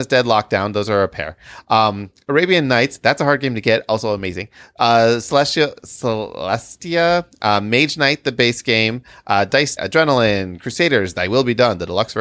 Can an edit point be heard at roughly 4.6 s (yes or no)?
no